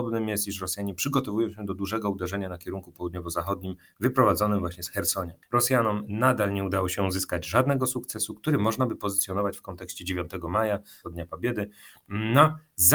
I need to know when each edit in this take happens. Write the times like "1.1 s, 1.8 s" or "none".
5.5 s, 11.0 s